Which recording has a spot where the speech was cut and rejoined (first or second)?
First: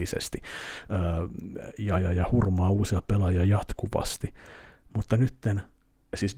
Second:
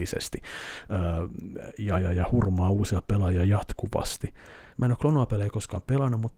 second